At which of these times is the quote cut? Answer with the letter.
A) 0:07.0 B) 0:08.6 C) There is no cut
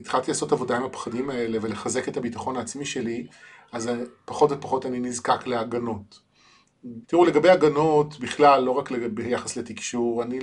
A